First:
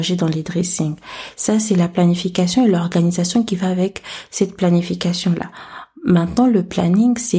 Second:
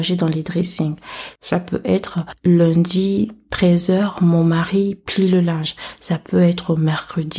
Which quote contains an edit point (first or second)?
second